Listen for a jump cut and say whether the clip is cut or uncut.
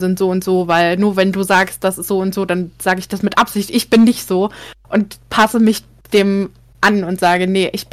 uncut